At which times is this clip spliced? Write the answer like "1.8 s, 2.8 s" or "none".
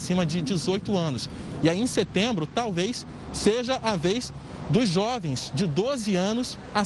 none